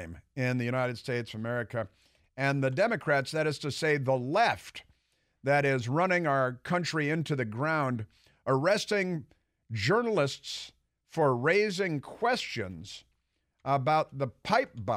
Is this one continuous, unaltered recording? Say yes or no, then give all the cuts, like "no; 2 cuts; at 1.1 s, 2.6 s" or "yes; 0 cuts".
yes; 0 cuts